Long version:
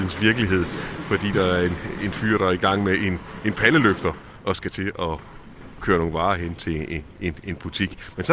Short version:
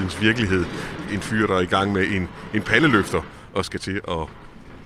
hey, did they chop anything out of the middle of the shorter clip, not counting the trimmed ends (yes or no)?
yes